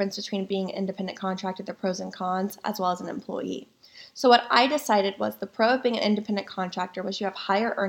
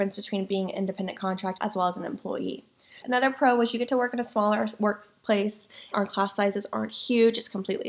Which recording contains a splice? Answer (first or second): second